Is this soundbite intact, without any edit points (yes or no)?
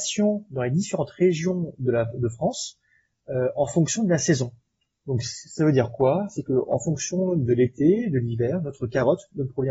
yes